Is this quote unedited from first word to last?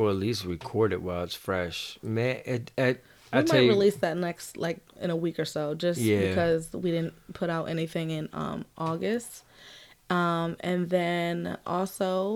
yes; 0 cuts

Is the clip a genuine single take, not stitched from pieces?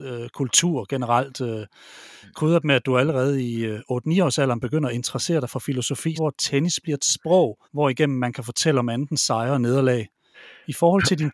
no; 2 cuts; at 6.2 s, 7.6 s

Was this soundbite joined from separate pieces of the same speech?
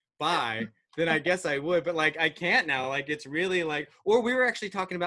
no; 0 cuts

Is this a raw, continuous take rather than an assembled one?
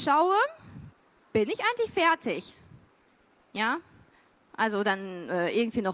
yes; 0 cuts

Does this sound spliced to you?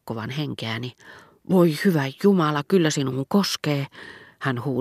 no; 0 cuts

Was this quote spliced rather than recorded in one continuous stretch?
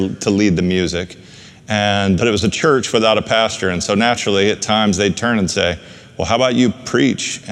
yes; 1 cut; at 2.2 s

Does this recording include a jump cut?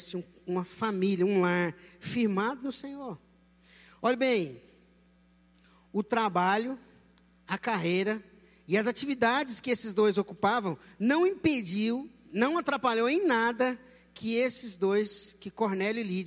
no; 0 cuts

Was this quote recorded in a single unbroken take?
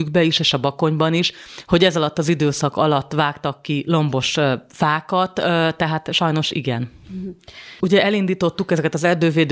no; 1 cut; at 7.8 s

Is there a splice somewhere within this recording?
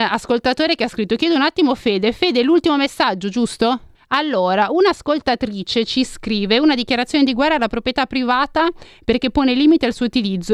yes; 1 cut; at 3.9 s

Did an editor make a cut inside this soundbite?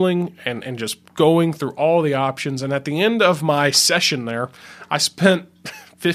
no; 0 cuts

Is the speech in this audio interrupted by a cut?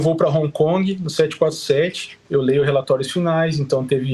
yes; 1 cut; at 2.2 s

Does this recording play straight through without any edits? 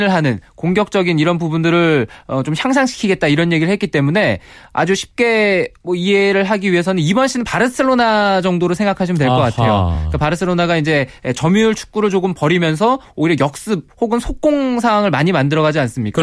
yes; 0 cuts

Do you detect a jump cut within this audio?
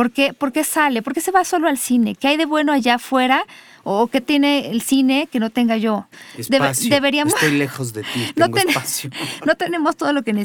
no; 0 cuts

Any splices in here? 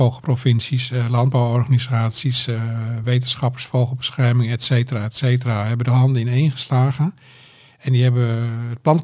no; 0 cuts

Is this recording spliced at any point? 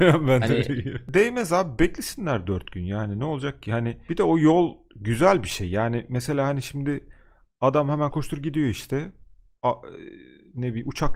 yes; 1 cut; at 8.1 s

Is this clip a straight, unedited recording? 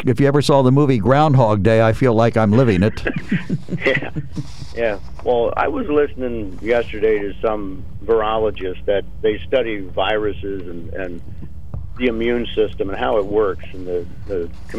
yes; 0 cuts

